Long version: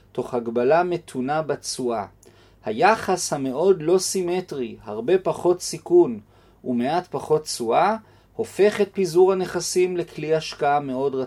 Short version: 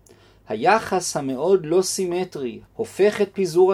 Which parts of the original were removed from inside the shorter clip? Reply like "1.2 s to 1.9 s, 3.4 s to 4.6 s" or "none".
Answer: 4.8 s to 8.2 s